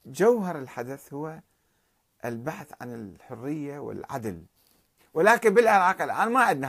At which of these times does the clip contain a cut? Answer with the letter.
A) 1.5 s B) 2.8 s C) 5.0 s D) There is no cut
C